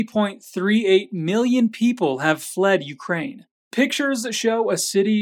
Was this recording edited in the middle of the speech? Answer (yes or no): yes